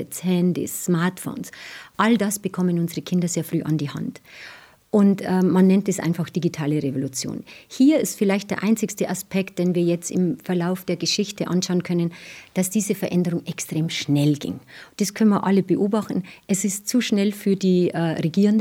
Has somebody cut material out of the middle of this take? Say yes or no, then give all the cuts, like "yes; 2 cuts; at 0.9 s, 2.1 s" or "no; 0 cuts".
no; 0 cuts